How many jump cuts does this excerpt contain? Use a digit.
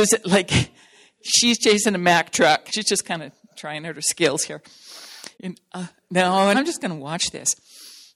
3